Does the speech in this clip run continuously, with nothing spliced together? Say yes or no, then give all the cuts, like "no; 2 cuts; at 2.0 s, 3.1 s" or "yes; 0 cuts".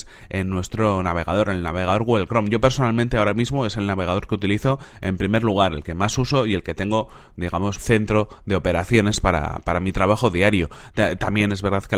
no; 1 cut; at 7.8 s